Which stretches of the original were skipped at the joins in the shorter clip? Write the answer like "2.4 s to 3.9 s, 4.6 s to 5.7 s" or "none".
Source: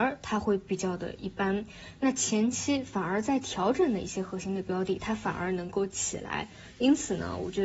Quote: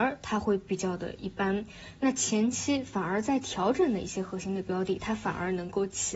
none